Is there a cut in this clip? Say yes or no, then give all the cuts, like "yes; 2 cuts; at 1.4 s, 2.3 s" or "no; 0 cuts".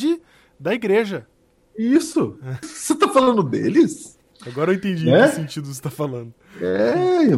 yes; 2 cuts; at 2.6 s, 4.3 s